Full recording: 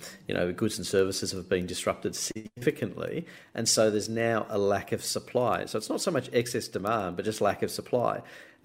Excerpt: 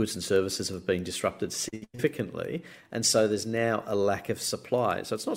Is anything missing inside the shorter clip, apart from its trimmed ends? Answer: no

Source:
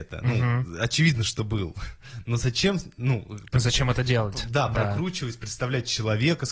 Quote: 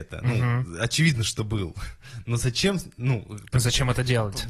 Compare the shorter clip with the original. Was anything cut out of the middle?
no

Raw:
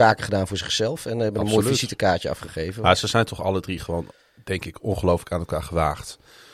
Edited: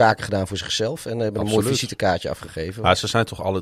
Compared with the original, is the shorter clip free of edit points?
yes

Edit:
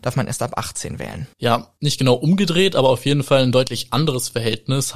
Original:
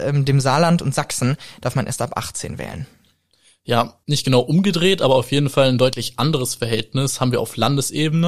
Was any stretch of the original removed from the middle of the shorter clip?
yes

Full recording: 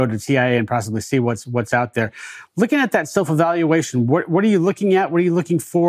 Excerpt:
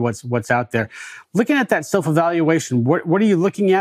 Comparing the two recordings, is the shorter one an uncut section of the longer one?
yes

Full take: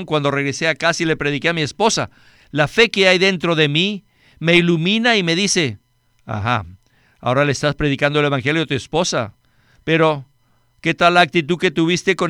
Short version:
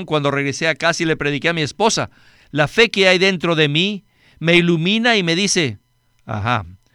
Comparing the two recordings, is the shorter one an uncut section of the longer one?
yes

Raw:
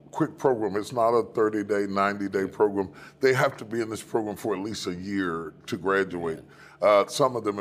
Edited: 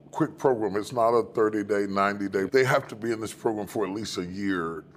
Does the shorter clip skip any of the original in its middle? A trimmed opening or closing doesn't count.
yes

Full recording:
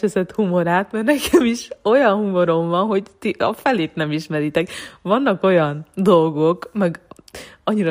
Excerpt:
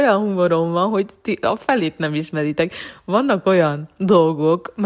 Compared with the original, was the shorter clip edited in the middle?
no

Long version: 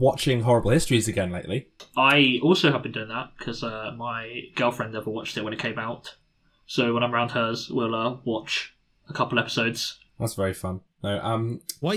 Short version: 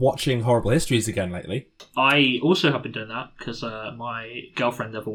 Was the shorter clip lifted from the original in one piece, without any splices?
yes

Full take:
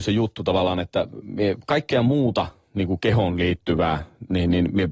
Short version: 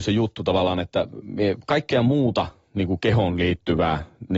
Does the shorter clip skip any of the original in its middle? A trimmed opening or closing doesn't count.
no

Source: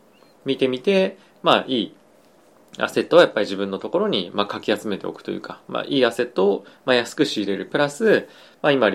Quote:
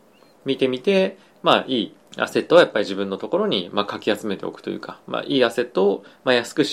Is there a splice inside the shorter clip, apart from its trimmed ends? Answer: yes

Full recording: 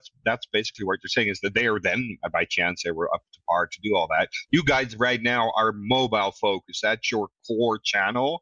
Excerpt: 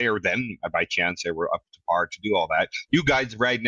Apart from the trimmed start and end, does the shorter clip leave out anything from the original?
no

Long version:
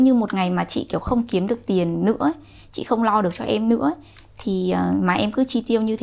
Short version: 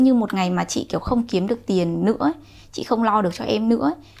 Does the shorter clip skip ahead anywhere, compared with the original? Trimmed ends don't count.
no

